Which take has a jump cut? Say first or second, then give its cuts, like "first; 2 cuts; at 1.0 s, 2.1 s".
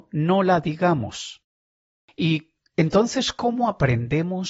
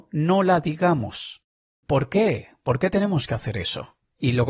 second; 1 cut; at 1.8 s